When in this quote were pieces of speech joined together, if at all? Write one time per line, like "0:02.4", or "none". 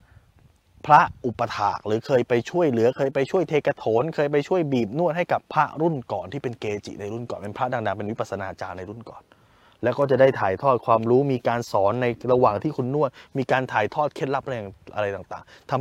0:05.4